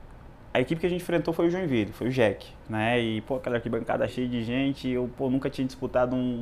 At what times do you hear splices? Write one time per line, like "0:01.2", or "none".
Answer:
0:04.1